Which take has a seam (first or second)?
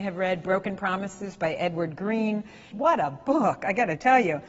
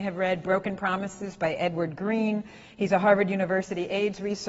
first